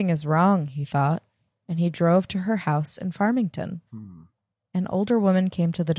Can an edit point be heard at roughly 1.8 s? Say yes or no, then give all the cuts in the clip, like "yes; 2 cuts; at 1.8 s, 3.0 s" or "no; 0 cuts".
no; 1 cut; at 3.9 s